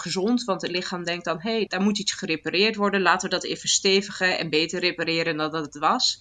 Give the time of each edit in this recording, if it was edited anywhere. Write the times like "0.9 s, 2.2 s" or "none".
1.7 s